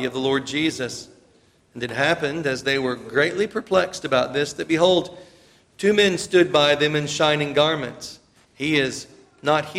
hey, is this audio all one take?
no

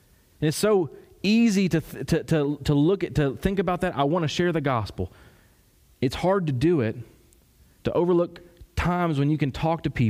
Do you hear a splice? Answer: yes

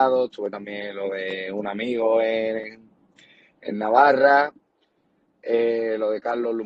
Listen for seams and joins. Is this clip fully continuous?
yes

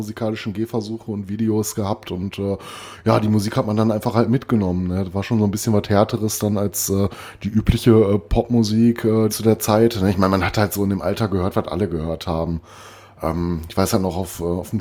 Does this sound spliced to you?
yes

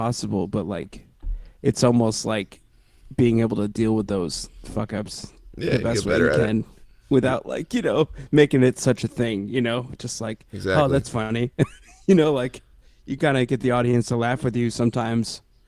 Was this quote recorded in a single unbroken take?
yes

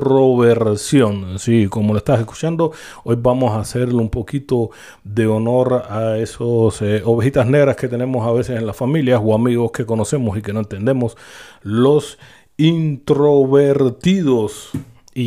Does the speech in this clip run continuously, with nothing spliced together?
yes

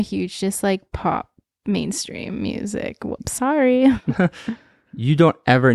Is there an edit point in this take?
no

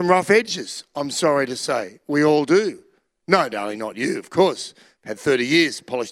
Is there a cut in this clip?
no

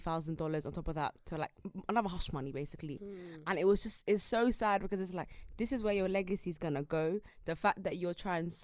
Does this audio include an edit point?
no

